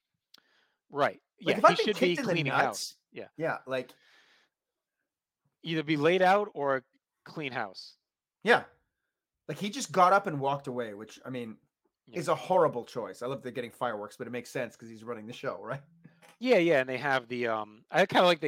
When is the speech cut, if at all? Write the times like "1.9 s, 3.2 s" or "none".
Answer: none